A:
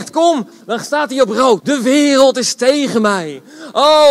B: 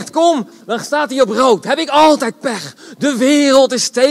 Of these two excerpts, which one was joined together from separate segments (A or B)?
A